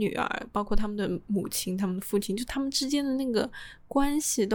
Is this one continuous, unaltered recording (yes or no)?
yes